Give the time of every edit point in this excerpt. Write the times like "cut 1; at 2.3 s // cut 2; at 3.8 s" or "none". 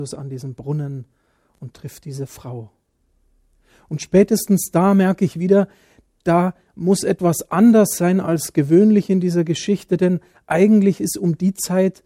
none